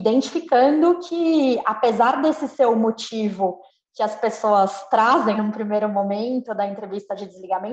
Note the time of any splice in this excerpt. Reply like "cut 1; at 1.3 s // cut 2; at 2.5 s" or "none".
cut 1; at 5.3 s